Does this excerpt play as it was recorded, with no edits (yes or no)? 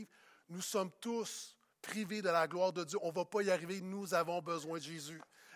yes